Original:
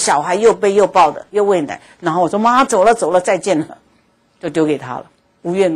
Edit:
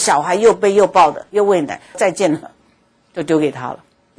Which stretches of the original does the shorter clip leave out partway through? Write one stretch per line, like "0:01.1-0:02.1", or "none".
0:01.9-0:03.2